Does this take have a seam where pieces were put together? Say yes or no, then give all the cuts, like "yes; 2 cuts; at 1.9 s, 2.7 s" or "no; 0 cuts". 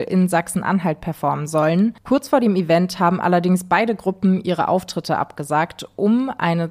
no; 0 cuts